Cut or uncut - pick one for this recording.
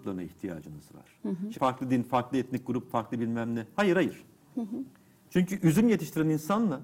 cut